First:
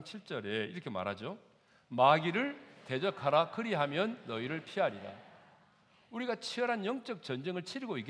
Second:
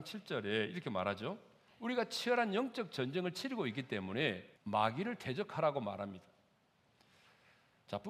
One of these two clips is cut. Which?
second; 2 cuts; at 1.7 s, 4.6 s

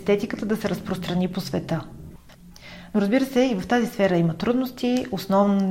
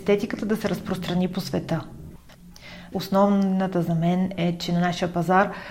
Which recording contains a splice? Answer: second; 1 cut; at 2.9 s

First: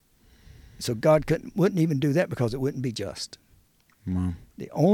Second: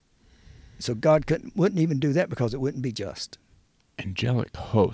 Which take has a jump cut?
second; 1 cut; at 3.8 s

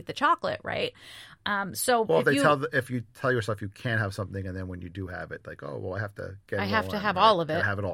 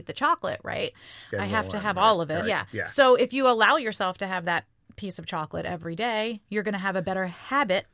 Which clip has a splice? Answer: second; 2 cuts; at 1.3 s, 2.4 s

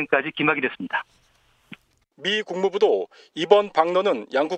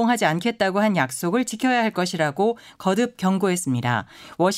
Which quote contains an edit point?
first; 1 cut; at 2.0 s

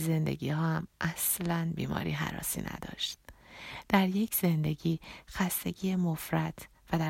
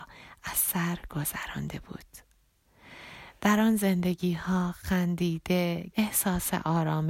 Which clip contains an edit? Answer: second; 1 cut; at 5.9 s

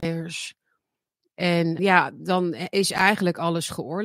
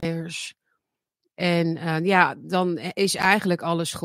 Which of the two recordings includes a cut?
first; 1 cut; at 1.8 s

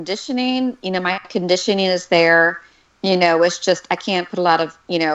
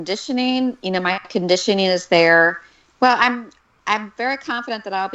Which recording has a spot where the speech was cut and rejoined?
second; 1 cut; at 2.9 s

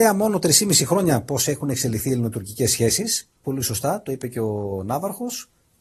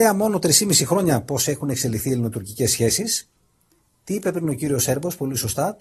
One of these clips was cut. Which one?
first; 1 cut; at 3.4 s

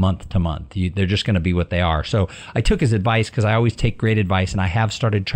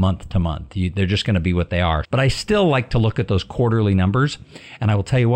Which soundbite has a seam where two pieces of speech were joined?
second; 1 cut; at 2.0 s

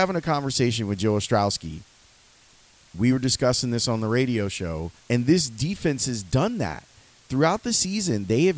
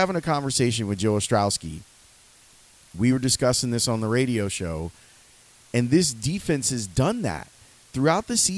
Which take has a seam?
first; 1 cut; at 5.0 s

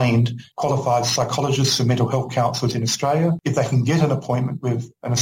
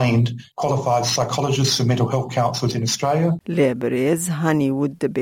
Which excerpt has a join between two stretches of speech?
second; 1 cut; at 3.4 s

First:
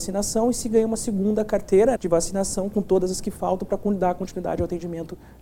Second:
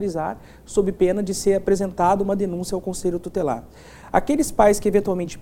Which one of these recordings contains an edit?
first; 1 cut; at 2.0 s

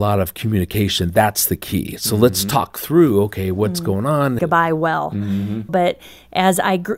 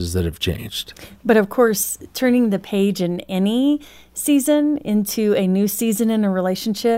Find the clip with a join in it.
first; 2 cuts; at 4.4 s, 5.7 s

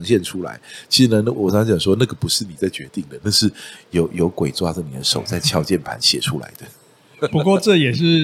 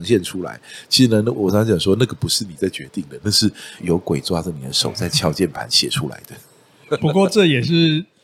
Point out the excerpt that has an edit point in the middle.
second; 1 cut; at 3.8 s

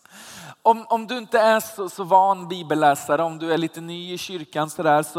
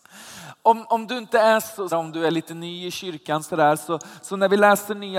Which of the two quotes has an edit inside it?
second; 1 cut; at 1.9 s

